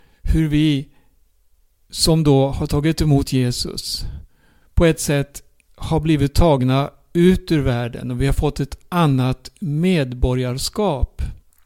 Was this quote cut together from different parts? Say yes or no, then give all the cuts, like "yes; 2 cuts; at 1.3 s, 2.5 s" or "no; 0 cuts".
no; 0 cuts